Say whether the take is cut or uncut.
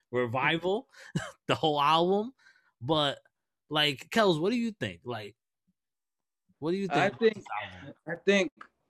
uncut